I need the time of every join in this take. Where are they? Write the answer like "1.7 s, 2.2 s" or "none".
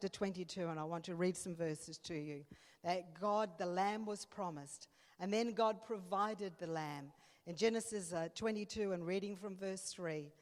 none